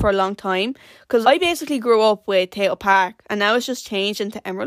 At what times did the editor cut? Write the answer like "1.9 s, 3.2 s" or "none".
1.2 s